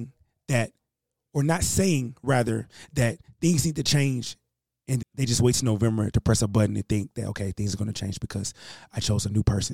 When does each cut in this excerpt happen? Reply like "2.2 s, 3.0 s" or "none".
5.0 s